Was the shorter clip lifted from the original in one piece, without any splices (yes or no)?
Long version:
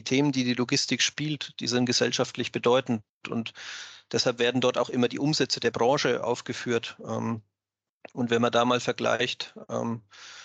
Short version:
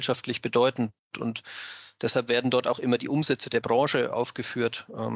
yes